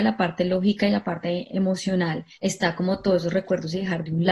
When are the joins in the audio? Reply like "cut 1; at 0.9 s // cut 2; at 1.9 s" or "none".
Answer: cut 1; at 2.3 s